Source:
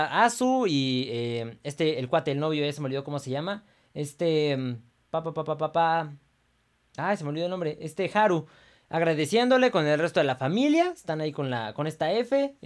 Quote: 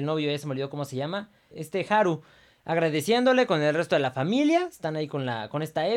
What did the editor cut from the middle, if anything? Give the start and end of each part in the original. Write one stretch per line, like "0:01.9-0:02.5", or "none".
0:03.9-0:07.8